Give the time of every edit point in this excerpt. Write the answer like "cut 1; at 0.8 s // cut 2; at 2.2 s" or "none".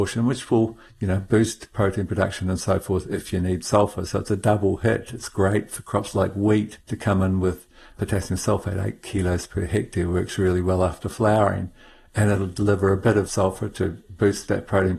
cut 1; at 6.8 s